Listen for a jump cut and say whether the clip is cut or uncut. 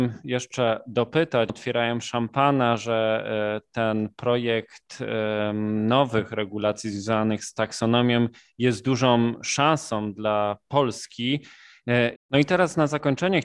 cut